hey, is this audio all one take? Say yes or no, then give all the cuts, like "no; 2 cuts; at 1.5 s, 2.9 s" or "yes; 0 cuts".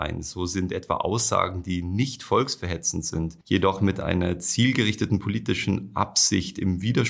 no; 1 cut; at 3.4 s